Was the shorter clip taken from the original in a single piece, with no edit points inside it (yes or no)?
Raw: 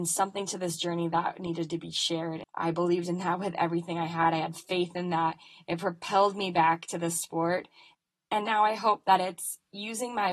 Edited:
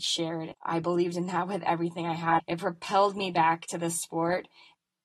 no